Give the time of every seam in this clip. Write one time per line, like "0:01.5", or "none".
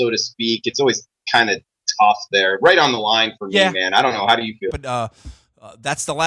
0:04.7